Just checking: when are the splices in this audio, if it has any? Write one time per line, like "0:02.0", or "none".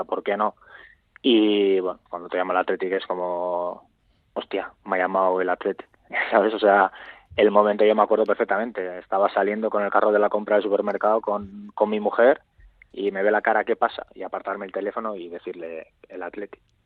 0:02.1

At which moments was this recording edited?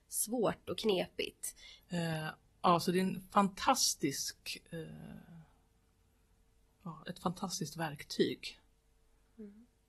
0:01.8

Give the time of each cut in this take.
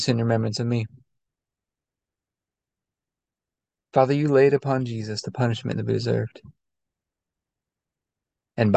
none

